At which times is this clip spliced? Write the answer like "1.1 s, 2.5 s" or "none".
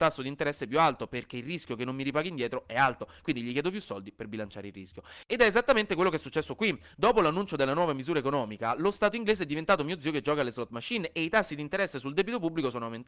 none